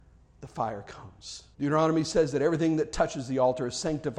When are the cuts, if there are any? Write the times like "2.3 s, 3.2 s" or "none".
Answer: 1.5 s